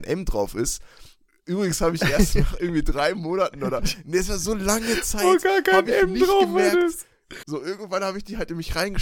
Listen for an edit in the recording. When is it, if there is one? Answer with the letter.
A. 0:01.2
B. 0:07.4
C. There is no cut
B